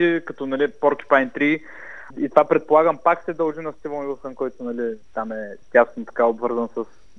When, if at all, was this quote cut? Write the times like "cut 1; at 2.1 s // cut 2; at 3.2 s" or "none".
cut 1; at 2.1 s